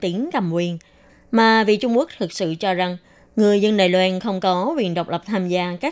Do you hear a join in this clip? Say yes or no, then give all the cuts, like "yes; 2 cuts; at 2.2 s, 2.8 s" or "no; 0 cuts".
yes; 1 cut; at 1.1 s